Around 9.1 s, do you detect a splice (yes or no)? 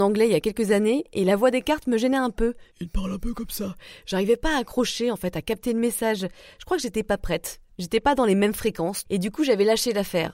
yes